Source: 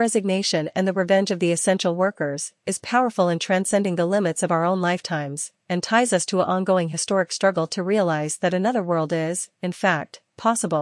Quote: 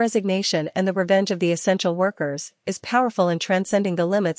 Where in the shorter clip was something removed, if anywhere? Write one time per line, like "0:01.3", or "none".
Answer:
none